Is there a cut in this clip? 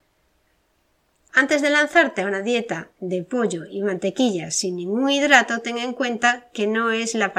yes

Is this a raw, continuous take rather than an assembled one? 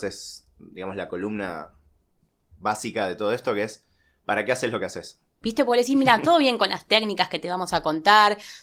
no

